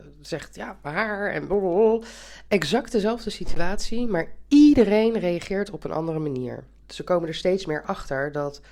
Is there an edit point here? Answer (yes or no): yes